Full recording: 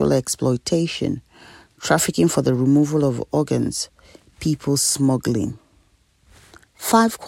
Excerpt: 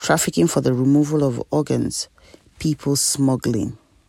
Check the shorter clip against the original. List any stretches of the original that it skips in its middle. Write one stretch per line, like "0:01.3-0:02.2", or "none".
none